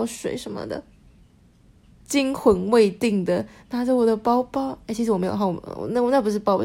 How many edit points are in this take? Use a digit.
1